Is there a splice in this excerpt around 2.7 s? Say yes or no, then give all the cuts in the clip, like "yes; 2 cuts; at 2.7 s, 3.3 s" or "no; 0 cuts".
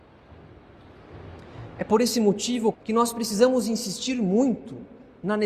yes; 1 cut; at 2.7 s